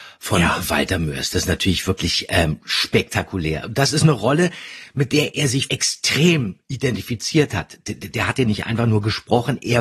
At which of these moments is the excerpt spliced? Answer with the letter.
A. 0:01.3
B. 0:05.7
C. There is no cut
B